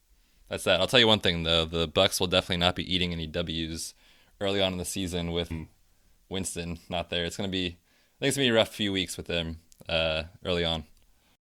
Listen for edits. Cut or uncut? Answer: cut